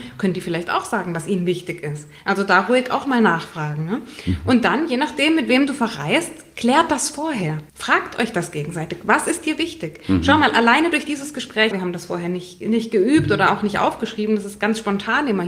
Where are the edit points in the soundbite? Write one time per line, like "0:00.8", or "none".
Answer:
0:07.7
0:11.7